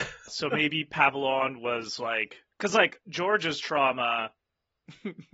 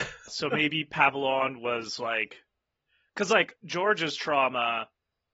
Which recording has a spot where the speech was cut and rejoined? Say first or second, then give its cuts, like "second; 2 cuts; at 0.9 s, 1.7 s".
first; 1 cut; at 2.5 s